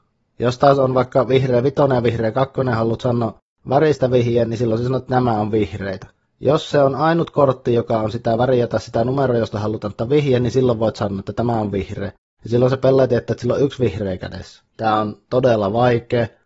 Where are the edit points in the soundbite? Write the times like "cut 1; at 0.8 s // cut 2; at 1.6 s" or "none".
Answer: cut 1; at 14.7 s